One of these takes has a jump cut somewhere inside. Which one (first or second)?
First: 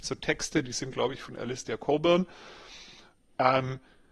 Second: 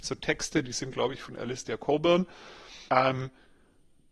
second